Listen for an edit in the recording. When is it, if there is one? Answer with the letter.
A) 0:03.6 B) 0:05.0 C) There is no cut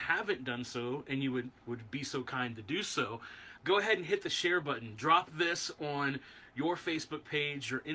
A